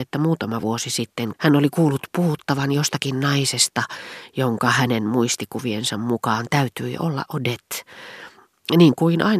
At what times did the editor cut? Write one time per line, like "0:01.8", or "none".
0:01.3